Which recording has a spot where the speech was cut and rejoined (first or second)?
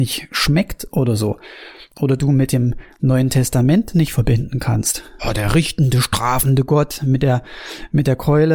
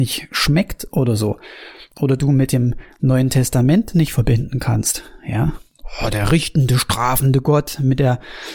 first